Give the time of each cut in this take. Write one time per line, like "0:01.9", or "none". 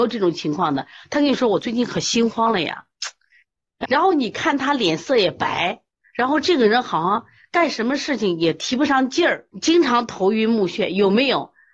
0:03.8
0:09.5